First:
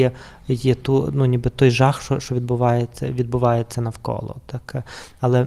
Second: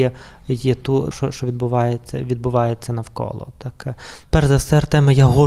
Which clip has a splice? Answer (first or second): second